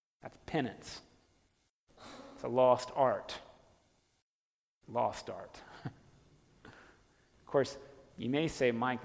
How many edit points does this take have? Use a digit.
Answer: 0